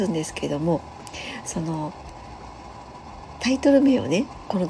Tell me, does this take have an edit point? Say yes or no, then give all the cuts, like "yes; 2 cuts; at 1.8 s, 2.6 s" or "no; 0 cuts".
no; 0 cuts